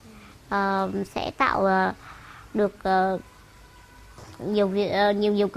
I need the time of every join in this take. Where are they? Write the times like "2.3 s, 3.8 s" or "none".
none